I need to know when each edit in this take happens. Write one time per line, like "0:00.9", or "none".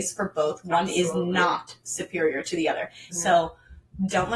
0:03.1